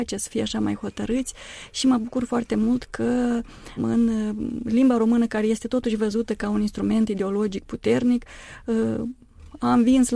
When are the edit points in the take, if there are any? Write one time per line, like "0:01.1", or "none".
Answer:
0:03.8